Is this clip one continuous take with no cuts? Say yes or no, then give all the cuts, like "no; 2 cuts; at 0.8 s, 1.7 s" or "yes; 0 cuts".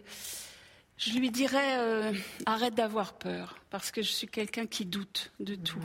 yes; 0 cuts